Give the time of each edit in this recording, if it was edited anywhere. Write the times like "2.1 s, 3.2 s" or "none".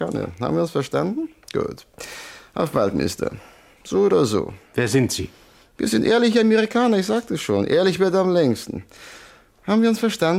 4.7 s